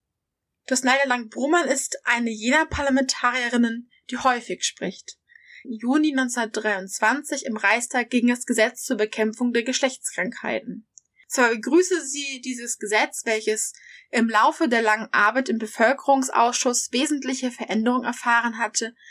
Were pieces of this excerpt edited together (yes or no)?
yes